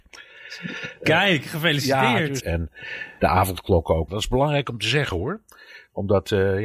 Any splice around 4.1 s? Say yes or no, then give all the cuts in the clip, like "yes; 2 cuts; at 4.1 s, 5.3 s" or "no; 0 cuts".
yes; 2 cuts; at 2.4 s, 4.1 s